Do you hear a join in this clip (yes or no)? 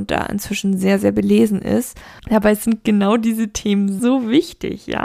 yes